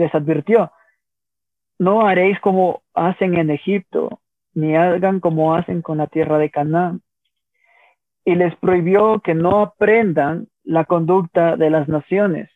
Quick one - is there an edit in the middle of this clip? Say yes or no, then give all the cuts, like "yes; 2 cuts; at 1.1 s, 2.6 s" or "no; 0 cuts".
no; 0 cuts